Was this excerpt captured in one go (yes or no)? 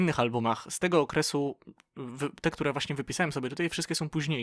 yes